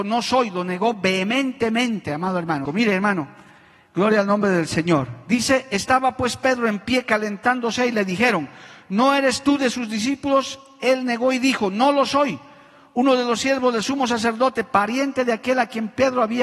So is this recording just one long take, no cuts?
no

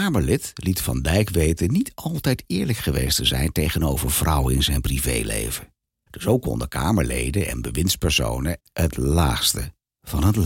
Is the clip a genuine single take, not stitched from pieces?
no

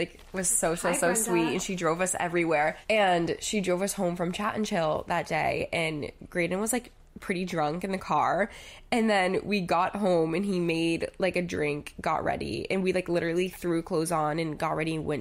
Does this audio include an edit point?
no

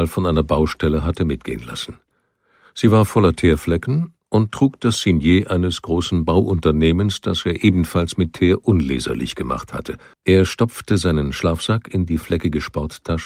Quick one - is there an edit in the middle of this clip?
yes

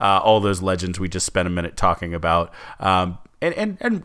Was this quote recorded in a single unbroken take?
yes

